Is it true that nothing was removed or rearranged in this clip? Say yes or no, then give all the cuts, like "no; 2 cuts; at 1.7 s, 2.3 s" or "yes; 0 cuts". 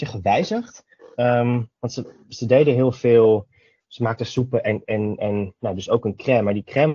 yes; 0 cuts